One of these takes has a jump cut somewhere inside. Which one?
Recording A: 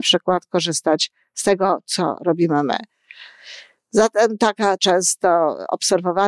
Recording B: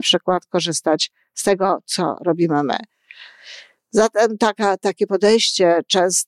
A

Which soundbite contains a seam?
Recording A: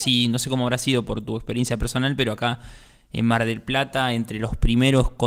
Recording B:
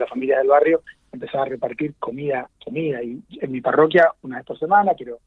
B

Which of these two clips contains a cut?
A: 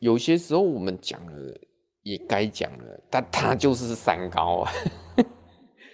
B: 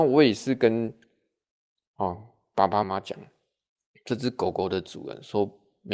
B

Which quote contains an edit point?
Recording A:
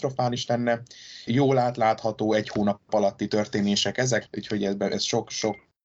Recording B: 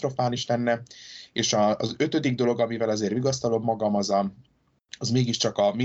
A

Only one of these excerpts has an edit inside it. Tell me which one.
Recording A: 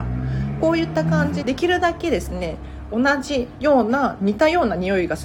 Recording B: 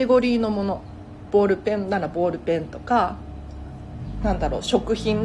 A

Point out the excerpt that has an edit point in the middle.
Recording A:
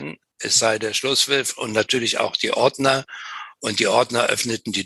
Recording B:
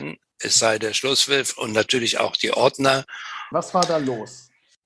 B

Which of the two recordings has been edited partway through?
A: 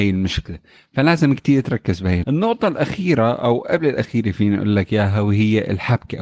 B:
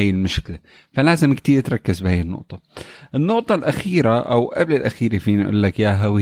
A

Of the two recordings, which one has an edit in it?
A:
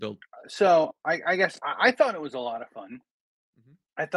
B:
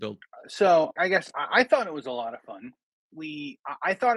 B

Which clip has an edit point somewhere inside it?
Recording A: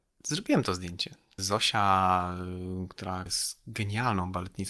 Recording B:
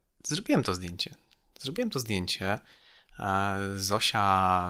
A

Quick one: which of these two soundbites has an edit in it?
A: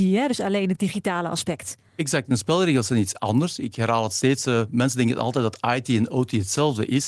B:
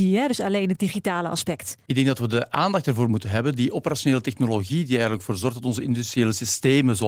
B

